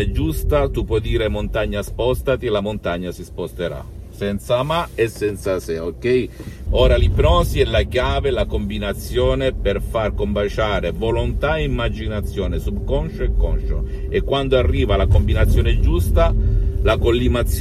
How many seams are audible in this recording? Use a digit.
1